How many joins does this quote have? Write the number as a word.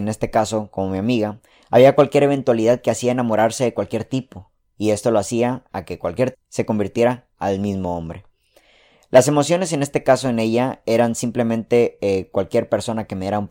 one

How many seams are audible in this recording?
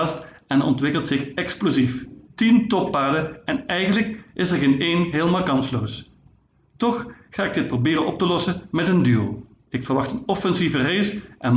two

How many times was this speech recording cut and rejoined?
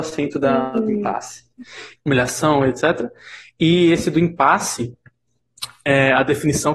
one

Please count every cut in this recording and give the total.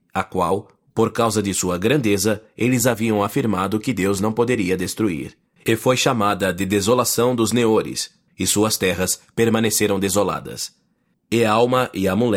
three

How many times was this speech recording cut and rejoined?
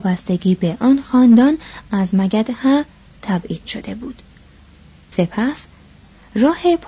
one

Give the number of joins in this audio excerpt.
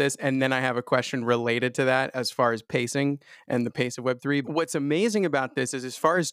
one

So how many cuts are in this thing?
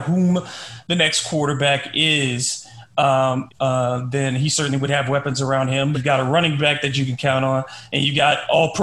two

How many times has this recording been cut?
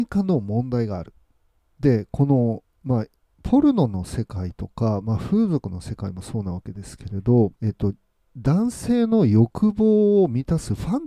two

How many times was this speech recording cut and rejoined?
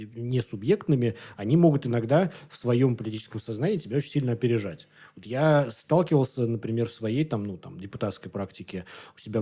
zero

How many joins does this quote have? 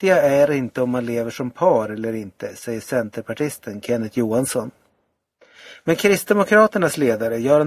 zero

